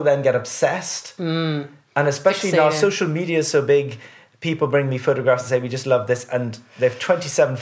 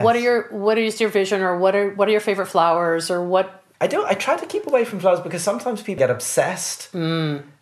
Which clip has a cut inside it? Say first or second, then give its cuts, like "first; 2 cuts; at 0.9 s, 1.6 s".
second; 2 cuts; at 3.7 s, 6.0 s